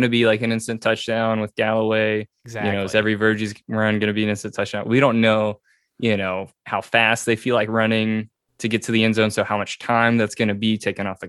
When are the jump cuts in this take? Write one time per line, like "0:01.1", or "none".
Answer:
none

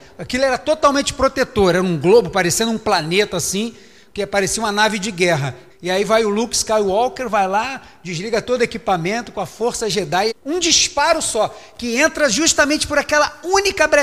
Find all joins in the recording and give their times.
0:05.7
0:10.3

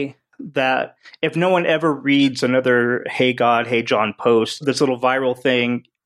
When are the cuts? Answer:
0:04.6

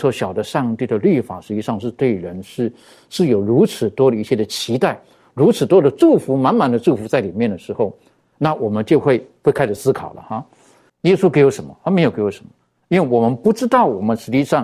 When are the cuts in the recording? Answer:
0:10.9

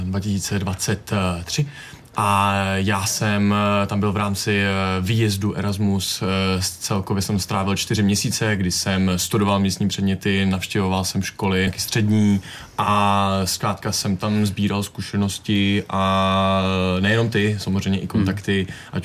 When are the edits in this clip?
0:11.7

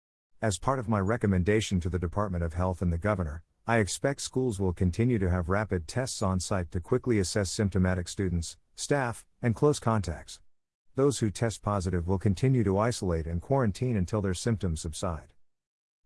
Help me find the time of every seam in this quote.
none

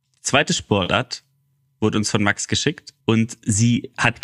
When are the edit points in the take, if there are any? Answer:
0:03.0

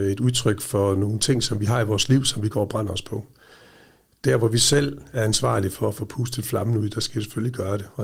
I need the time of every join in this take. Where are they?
none

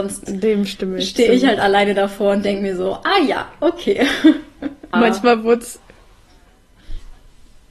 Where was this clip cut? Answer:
0:04.9

